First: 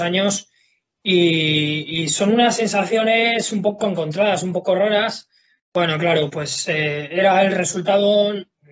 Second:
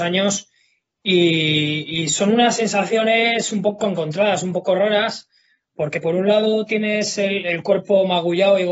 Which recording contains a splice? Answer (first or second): first